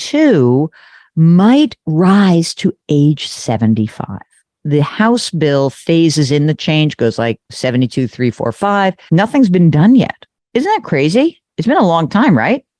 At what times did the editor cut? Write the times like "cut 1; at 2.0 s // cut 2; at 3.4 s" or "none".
cut 1; at 7.5 s // cut 2; at 9.1 s